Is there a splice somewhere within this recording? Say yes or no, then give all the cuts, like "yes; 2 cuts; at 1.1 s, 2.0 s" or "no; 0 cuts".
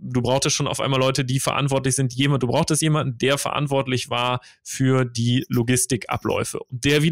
no; 0 cuts